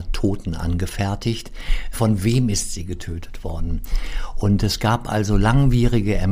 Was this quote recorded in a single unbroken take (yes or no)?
no